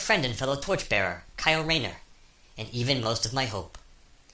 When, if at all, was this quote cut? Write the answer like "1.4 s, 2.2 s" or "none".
none